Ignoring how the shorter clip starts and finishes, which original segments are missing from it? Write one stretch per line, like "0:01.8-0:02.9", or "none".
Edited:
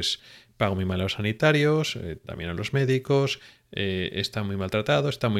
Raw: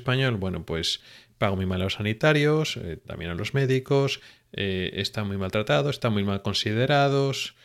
none

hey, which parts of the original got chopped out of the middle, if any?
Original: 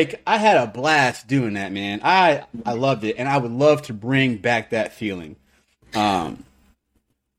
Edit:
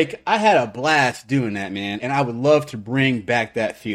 0:02.0-0:03.2

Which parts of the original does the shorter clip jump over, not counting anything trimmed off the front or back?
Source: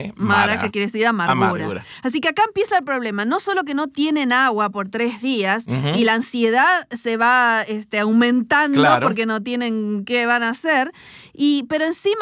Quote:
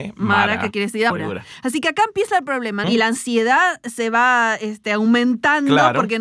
0:01.1-0:01.5
0:03.2-0:05.9

